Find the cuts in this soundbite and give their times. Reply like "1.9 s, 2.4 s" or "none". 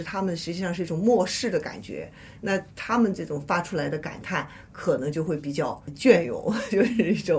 none